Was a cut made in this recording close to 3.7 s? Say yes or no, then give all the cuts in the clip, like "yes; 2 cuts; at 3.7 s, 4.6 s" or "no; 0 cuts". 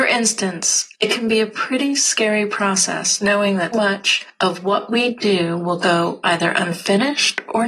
yes; 2 cuts; at 0.9 s, 3.7 s